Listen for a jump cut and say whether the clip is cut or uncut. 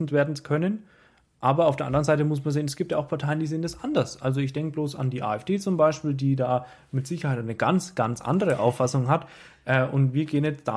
uncut